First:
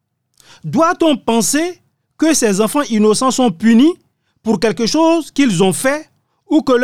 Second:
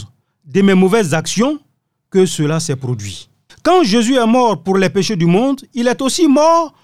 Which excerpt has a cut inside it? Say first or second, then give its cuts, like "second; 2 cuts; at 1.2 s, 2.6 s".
second; 1 cut; at 3.5 s